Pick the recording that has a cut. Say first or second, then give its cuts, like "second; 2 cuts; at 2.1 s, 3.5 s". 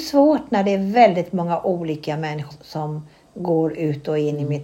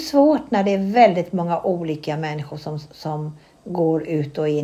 first; 1 cut; at 2.5 s